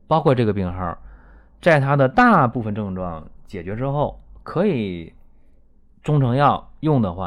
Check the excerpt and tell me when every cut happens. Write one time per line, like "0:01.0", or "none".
none